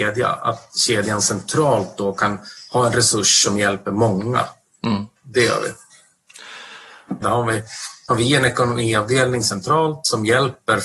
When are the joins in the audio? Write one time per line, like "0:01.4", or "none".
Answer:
0:05.2
0:07.2